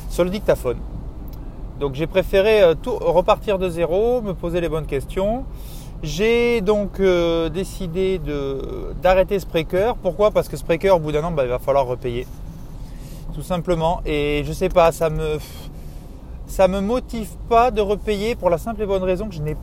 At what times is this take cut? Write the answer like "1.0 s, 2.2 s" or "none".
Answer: none